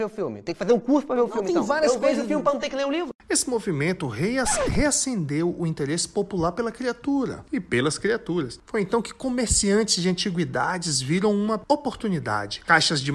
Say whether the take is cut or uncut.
uncut